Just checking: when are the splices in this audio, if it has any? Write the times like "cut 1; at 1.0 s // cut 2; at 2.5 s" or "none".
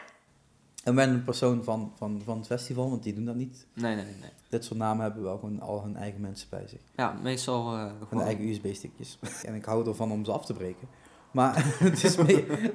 cut 1; at 9.4 s